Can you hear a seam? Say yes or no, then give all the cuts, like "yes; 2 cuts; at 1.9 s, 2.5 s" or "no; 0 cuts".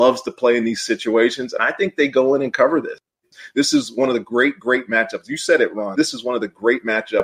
yes; 1 cut; at 6.0 s